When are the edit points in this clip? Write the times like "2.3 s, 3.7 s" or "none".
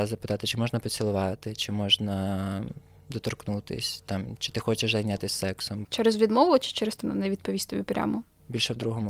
5.8 s, 7.0 s